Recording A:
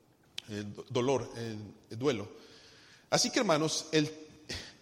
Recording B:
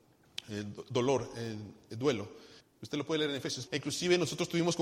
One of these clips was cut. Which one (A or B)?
B